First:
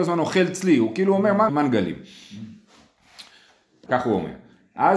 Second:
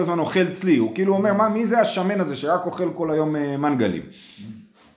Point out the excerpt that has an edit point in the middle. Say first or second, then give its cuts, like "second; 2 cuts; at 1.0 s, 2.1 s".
first; 2 cuts; at 1.5 s, 3.9 s